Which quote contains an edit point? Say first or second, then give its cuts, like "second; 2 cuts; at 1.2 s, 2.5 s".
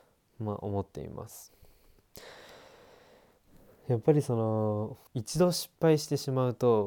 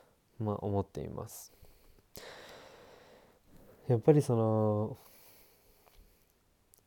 first; 1 cut; at 5.1 s